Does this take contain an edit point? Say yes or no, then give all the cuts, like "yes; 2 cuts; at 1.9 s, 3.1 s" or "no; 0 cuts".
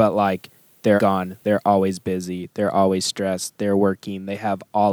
yes; 1 cut; at 1.0 s